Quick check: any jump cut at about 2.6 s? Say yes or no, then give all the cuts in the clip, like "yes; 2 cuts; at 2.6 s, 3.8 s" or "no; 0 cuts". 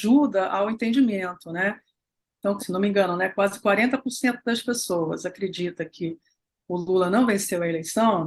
yes; 1 cut; at 2.6 s